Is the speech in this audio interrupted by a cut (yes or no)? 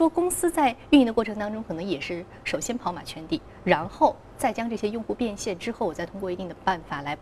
no